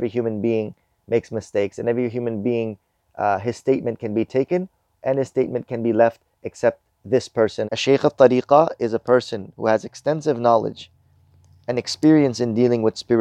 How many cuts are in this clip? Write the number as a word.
one